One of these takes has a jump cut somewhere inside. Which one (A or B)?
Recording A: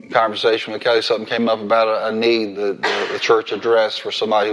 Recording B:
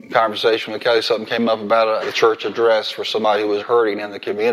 B